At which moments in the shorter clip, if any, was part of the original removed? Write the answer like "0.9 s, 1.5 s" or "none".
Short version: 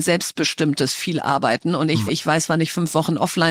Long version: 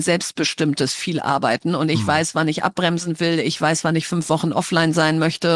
2.1 s